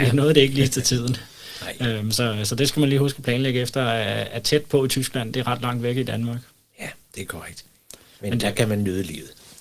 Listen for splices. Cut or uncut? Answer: cut